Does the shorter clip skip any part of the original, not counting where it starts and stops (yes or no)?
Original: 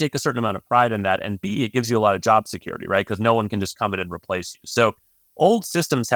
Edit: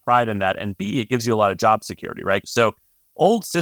yes